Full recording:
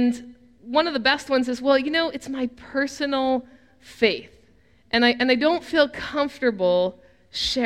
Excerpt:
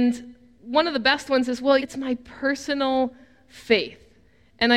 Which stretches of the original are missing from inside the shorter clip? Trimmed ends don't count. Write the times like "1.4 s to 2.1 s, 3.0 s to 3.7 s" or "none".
1.8 s to 2.1 s